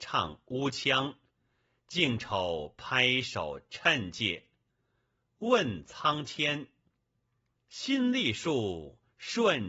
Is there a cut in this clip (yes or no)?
no